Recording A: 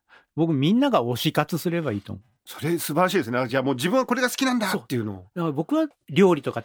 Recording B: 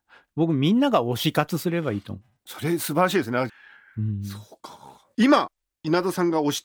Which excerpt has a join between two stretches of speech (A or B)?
B